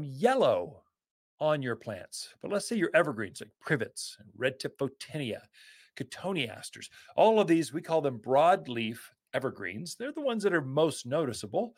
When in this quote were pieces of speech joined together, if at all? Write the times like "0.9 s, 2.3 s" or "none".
2.3 s